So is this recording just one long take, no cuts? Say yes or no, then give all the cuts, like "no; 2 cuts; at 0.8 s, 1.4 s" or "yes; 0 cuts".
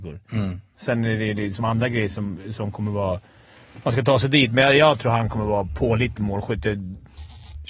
yes; 0 cuts